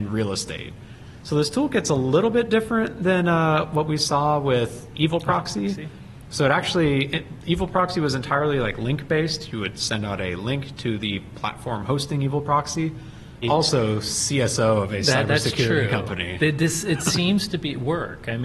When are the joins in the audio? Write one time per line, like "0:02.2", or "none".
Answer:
0:13.4